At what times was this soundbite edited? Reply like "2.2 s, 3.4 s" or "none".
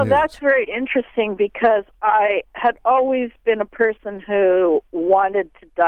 none